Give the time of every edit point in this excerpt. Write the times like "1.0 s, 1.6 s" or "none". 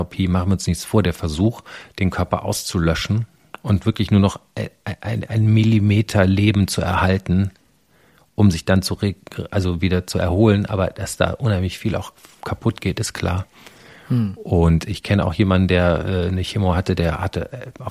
none

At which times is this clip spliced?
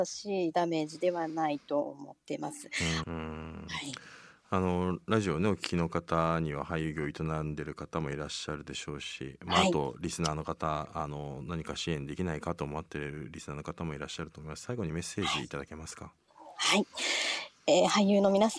3.0 s

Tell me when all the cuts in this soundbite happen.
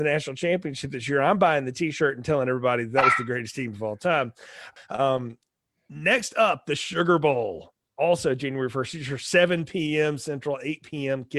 4.8 s

